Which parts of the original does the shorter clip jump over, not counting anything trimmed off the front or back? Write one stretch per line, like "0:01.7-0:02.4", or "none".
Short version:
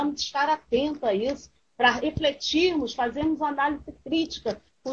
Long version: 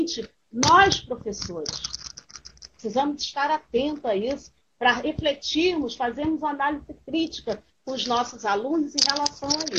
none